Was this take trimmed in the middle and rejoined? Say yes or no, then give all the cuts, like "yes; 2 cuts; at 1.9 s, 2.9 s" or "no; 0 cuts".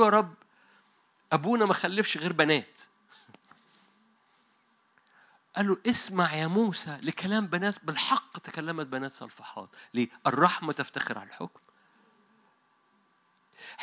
no; 0 cuts